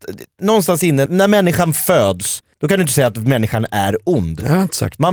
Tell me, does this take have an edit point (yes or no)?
yes